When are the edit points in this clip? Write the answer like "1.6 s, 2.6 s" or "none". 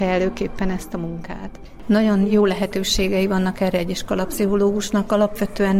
1.8 s